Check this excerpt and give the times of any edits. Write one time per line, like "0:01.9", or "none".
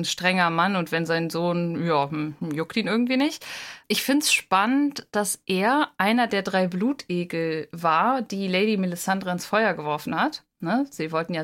0:03.8